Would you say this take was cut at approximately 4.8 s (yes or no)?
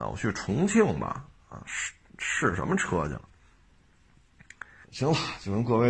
yes